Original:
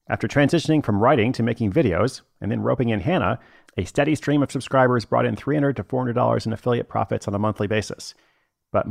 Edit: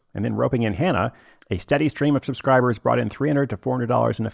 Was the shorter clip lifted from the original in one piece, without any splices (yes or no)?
yes